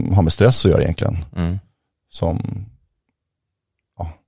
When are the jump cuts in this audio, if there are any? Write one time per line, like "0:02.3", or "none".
none